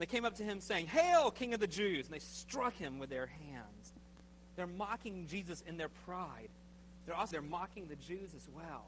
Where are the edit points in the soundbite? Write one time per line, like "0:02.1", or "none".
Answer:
0:07.3